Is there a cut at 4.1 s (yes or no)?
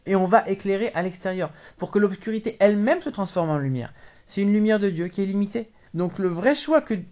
yes